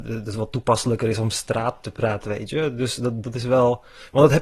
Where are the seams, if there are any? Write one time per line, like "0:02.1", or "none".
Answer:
0:02.2
0:03.2